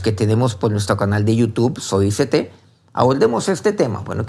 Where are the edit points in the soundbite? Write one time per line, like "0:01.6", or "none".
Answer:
none